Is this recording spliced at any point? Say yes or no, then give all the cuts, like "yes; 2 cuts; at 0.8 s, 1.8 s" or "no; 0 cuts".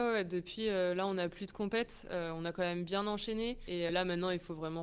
yes; 1 cut; at 3.9 s